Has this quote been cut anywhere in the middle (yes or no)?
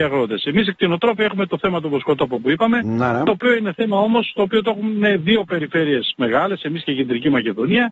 no